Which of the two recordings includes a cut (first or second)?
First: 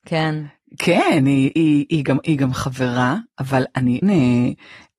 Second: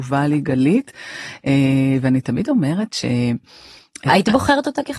first